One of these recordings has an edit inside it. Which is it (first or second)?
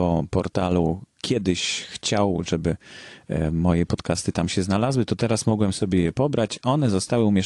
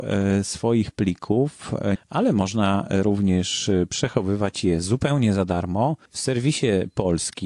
second